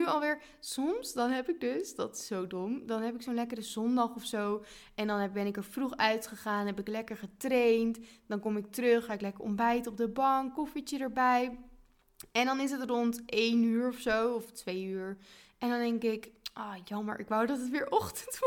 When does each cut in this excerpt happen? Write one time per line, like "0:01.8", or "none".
none